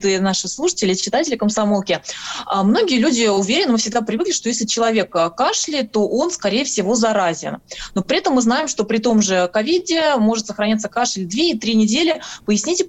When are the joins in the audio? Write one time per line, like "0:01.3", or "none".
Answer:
none